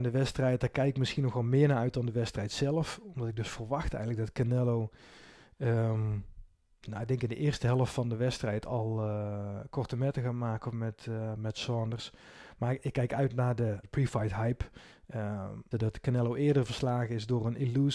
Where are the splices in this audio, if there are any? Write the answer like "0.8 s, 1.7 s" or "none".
13.8 s, 15.7 s